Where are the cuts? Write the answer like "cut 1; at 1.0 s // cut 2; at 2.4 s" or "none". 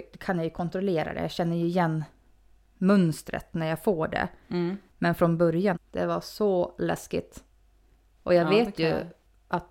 cut 1; at 5.7 s